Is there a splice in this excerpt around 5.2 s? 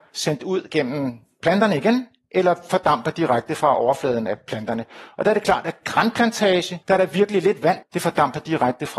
no; 2 cuts; at 6.8 s, 7.8 s

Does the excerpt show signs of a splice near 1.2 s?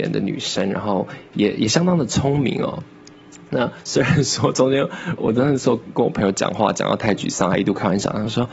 no; 1 cut; at 5.2 s

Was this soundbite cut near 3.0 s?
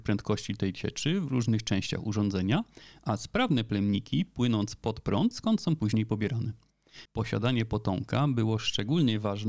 no; 2 cuts; at 5.3 s, 7.1 s

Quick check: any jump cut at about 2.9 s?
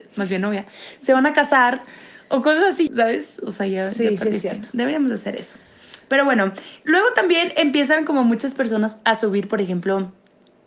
yes; 1 cut; at 2.9 s

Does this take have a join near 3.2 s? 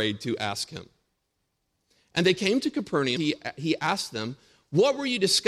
yes; 1 cut; at 3.2 s

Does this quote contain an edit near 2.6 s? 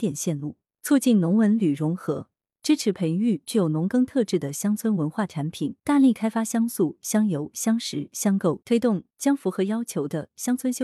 no; 2 cuts; at 5.8 s, 8.6 s

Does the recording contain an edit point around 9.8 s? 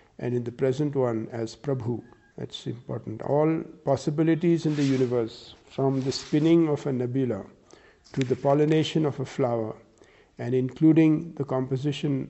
no; 1 cut; at 2.3 s

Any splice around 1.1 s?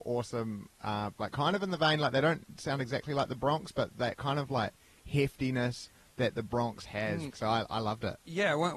yes; 2 cuts; at 1.1 s, 7.3 s

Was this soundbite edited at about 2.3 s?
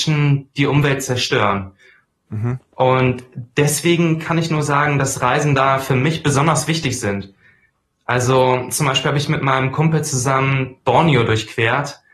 yes; 1 cut; at 2.3 s

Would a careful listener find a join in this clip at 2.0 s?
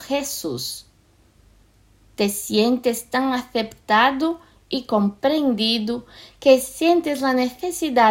yes; 1 cut; at 2.0 s

